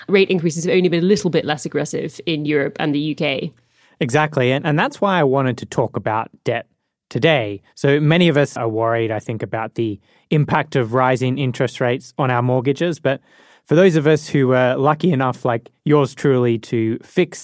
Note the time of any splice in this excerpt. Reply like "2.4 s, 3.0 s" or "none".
none